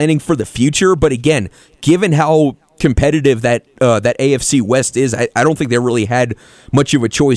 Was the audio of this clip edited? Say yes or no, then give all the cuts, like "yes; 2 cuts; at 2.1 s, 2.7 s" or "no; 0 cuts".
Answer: no; 0 cuts